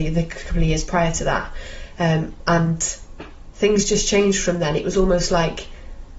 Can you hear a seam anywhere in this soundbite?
no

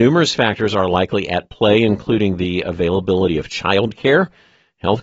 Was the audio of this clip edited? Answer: no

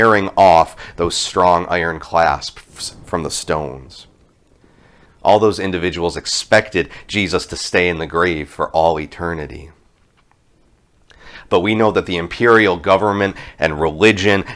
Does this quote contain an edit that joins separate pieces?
yes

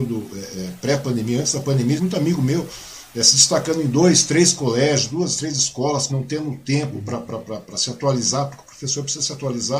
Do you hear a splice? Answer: yes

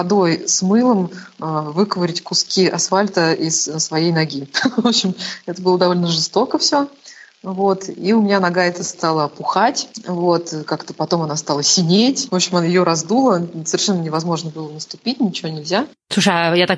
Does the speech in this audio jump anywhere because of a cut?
no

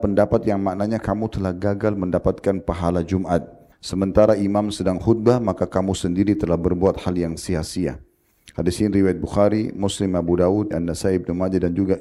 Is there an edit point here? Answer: yes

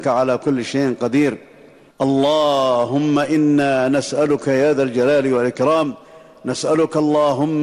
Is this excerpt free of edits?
yes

